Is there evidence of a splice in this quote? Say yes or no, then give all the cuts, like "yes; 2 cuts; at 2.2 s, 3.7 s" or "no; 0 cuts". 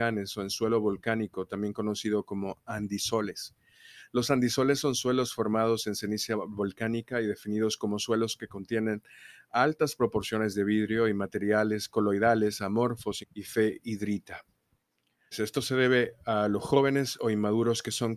yes; 2 cuts; at 13.2 s, 15.3 s